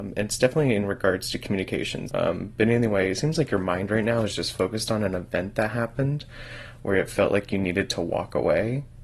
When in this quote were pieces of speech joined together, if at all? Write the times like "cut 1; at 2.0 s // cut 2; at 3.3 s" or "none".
cut 1; at 2.1 s